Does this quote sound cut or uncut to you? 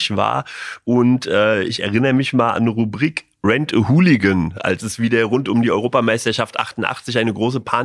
uncut